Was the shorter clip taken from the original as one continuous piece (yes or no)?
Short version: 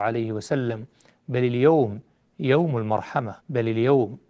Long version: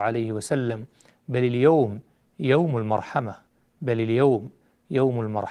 no